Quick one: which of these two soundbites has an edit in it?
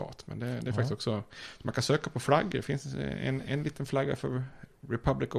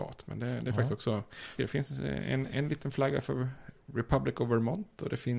second; 1 cut; at 1.6 s

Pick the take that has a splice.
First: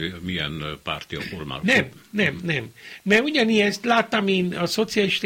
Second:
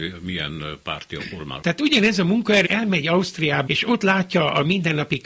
second; 3 cuts; at 1.6 s, 2.6 s, 3.7 s

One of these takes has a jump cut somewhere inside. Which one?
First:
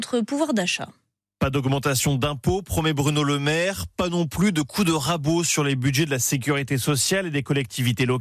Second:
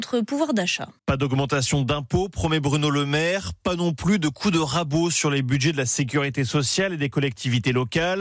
second; 1 cut; at 1.0 s

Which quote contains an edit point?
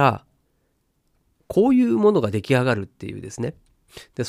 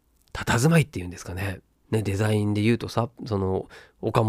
second; 1 cut; at 1.7 s

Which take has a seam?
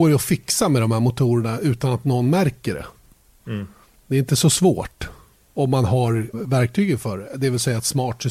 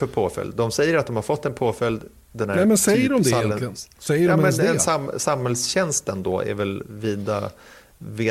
first; 1 cut; at 6.3 s

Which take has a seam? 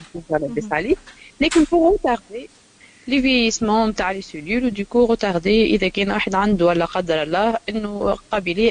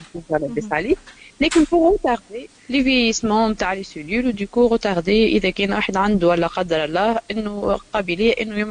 second; 1 cut; at 2.6 s

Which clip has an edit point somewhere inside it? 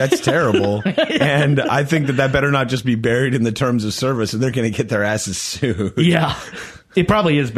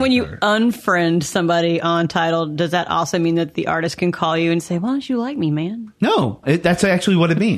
second; 1 cut; at 6.4 s

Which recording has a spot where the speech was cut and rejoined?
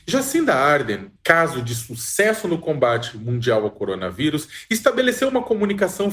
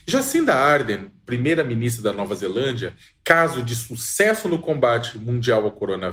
first; 1 cut; at 1.2 s

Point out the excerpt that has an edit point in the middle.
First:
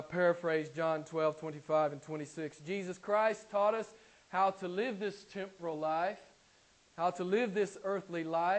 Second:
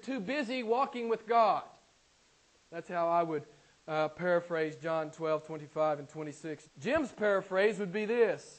second; 1 cut; at 6.6 s

